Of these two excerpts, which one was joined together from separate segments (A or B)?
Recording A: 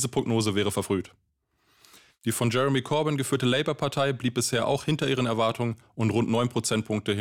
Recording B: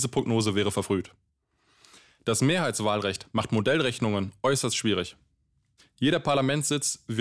A